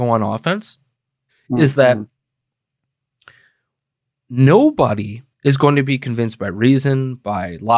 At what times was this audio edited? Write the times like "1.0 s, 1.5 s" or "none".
1.3 s, 5.3 s